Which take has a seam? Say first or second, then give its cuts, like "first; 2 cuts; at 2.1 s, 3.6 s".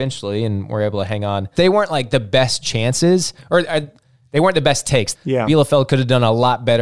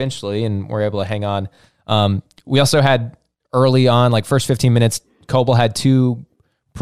first; 2 cuts; at 1.6 s, 5.1 s